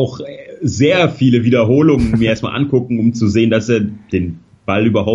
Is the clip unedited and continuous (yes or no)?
yes